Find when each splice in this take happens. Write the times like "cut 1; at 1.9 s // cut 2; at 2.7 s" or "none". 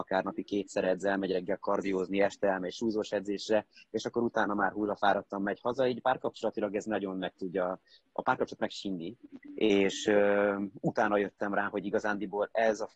none